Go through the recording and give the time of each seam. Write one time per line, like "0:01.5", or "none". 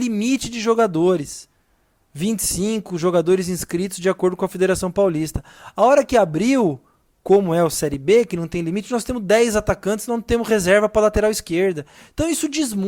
none